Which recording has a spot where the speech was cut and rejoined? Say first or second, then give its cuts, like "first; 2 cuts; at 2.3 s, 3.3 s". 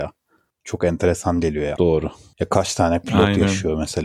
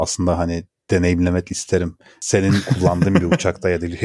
first; 1 cut; at 1.8 s